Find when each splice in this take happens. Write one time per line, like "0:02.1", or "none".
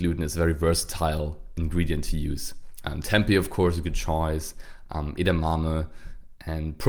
none